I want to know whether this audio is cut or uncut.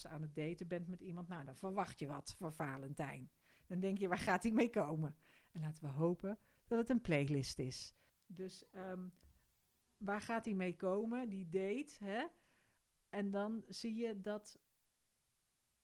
cut